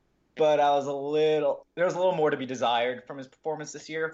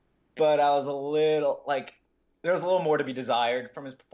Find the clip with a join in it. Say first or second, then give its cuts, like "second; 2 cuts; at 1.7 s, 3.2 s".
first; 1 cut; at 1.6 s